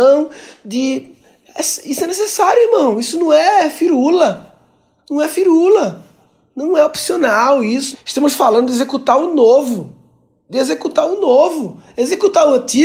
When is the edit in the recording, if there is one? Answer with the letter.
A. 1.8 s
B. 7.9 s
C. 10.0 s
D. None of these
B